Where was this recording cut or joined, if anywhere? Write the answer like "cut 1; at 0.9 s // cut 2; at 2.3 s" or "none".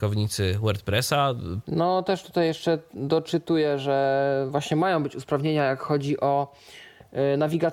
cut 1; at 1.6 s

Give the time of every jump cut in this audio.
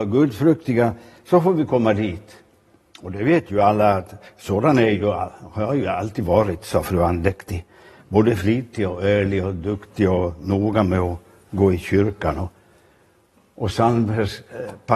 none

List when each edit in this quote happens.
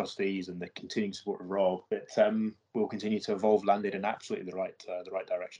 cut 1; at 1.9 s

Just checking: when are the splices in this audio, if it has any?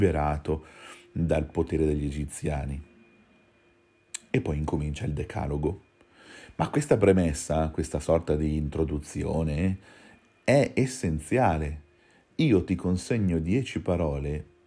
none

